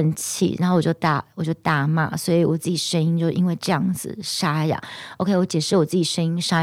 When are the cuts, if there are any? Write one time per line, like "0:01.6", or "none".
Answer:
none